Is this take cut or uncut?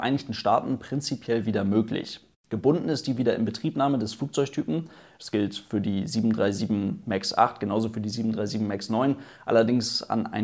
uncut